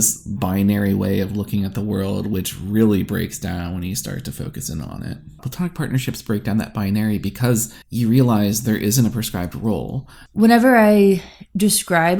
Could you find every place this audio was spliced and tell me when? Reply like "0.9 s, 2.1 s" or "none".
7.8 s